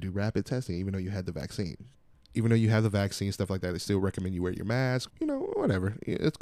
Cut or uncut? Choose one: cut